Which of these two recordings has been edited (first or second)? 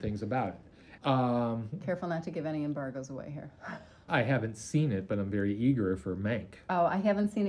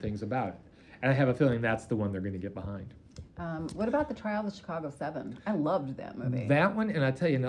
first